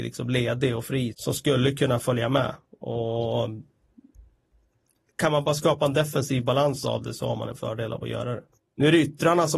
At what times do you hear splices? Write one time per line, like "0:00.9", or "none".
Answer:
0:01.1
0:08.6